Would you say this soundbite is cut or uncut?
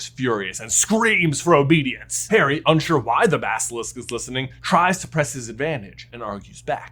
uncut